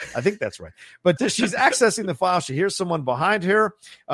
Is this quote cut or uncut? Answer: cut